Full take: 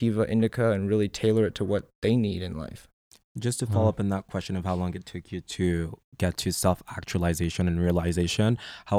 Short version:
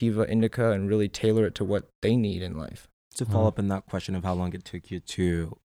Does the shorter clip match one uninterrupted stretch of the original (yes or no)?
no